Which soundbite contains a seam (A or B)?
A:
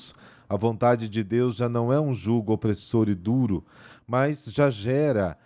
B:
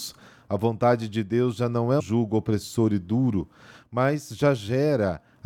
B